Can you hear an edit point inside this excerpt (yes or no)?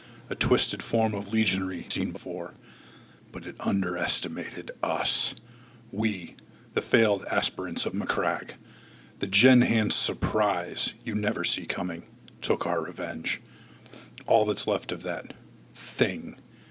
no